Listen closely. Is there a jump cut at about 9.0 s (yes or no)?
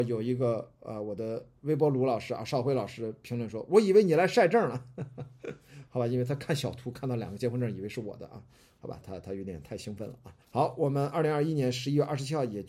yes